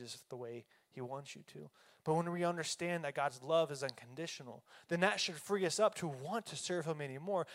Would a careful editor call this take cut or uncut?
cut